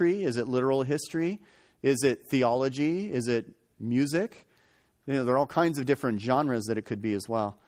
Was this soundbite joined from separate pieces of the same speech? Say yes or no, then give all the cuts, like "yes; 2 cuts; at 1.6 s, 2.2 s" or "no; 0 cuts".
yes; 1 cut; at 4.9 s